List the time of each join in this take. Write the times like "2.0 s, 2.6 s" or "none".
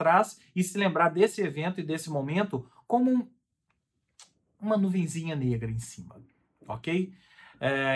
none